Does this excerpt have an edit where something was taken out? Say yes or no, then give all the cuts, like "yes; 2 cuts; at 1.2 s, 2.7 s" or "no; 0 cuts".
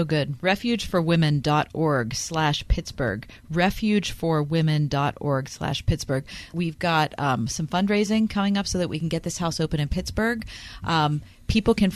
no; 0 cuts